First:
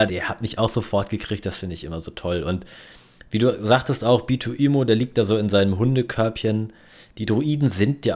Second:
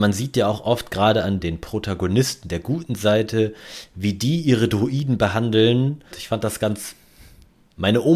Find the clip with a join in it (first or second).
second